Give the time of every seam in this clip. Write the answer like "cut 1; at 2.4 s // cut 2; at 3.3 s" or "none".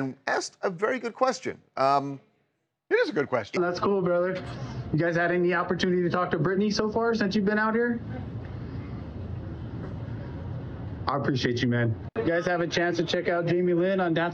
cut 1; at 3.6 s // cut 2; at 12.1 s